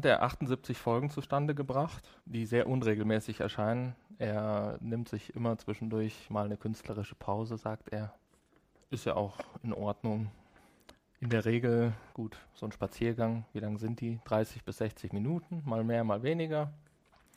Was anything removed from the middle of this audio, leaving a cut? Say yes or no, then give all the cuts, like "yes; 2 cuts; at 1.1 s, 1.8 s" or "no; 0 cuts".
yes; 2 cuts; at 2.2 s, 12.1 s